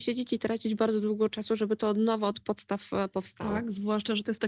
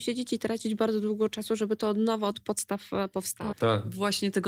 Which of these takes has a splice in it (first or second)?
second